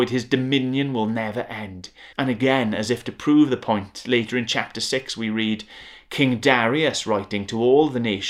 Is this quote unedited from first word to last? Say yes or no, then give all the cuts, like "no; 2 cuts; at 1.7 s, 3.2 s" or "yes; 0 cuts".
no; 1 cut; at 2.1 s